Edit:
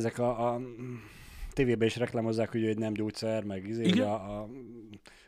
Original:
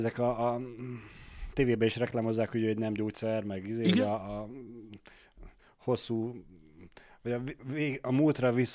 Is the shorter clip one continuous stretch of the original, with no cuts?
yes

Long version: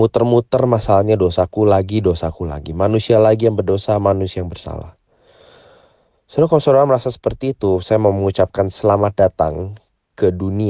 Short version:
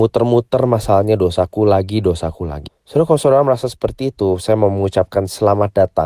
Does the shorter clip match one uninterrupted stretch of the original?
no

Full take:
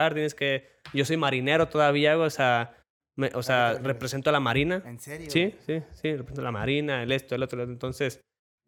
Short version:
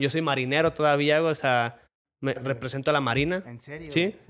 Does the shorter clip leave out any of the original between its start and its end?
yes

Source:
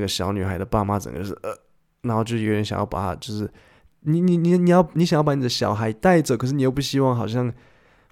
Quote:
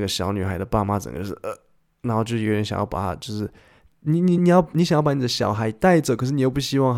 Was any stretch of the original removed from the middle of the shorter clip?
yes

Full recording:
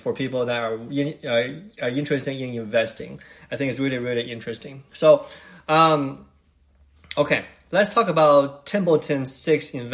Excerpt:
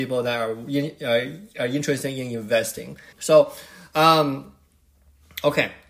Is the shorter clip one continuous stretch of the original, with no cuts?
no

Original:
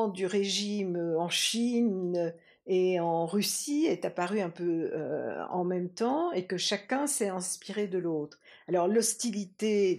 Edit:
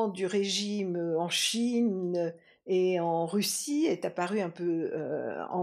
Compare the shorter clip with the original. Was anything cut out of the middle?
no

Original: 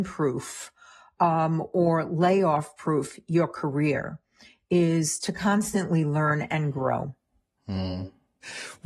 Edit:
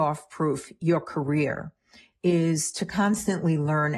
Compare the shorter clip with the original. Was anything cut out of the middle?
no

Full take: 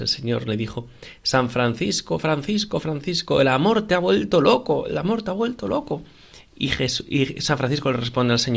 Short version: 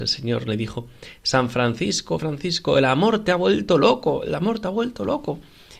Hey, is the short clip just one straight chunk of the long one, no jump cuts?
no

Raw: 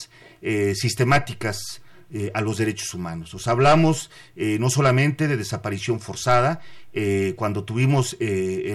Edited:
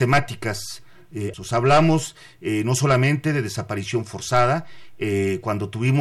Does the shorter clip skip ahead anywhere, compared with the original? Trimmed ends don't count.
yes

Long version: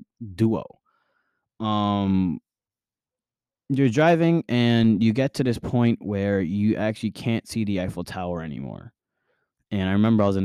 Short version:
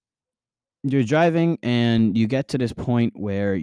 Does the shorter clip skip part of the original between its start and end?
no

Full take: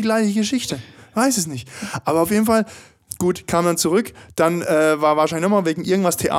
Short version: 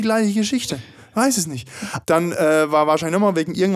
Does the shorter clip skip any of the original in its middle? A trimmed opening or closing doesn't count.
yes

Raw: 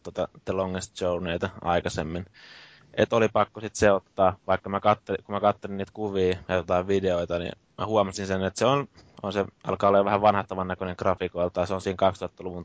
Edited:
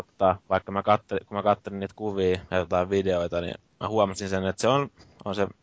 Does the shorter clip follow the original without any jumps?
yes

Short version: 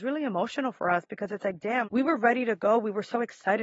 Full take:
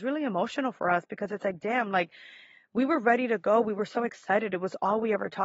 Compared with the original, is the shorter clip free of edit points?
no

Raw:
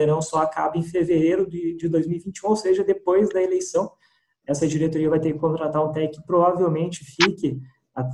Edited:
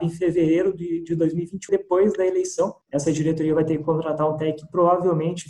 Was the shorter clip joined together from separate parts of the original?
yes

